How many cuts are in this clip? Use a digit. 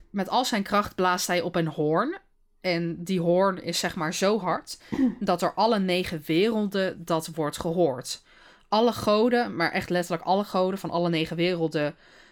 0